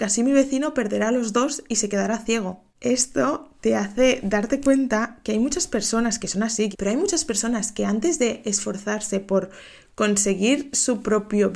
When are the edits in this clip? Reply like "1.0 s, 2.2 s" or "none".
6.7 s